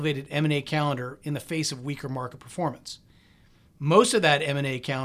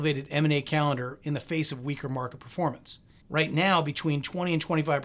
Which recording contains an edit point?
second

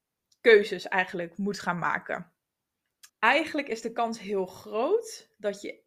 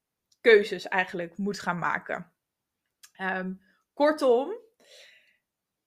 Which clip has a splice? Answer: first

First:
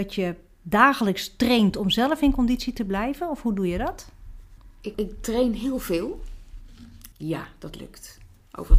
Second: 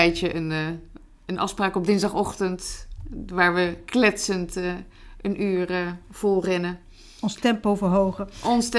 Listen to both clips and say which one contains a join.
first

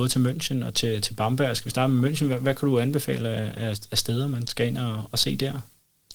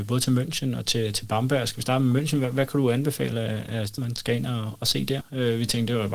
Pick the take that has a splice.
second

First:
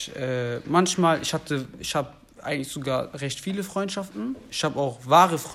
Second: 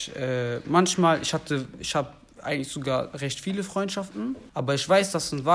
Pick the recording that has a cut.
second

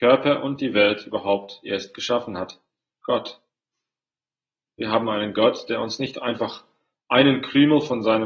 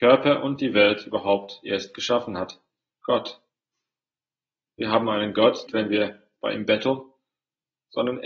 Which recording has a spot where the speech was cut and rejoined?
second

